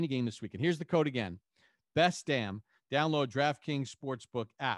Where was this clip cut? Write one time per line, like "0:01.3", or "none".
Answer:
none